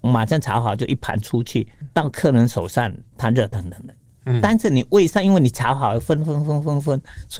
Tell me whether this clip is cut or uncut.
uncut